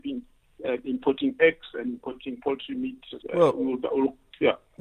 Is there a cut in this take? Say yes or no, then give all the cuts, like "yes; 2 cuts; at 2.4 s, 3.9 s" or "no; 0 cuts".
yes; 1 cut; at 3.2 s